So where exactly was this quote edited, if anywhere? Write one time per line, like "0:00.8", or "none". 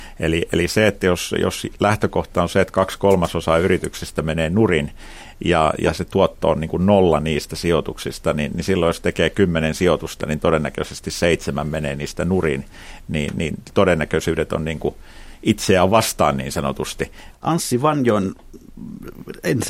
0:17.3